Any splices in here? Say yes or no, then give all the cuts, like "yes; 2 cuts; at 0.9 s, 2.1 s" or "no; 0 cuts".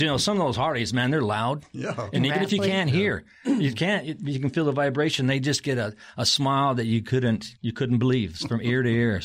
yes; 2 cuts; at 2.1 s, 7.5 s